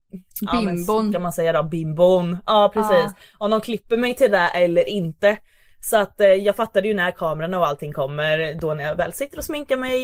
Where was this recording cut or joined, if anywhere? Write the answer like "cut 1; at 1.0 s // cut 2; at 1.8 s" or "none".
none